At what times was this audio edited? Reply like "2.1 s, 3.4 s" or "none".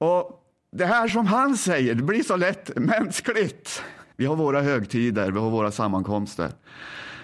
4.1 s